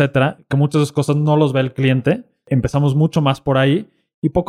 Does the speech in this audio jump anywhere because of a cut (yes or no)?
no